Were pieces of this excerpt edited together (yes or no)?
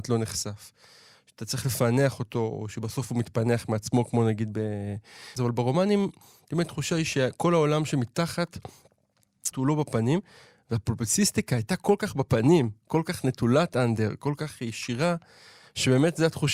yes